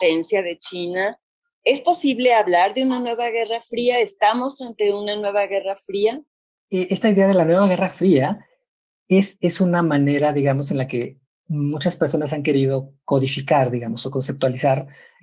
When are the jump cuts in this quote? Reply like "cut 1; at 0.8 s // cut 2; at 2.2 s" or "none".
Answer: none